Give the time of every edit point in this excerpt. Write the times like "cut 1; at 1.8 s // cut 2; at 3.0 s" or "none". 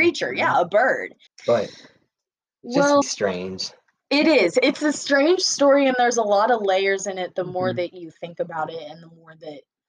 cut 1; at 1.3 s // cut 2; at 3.0 s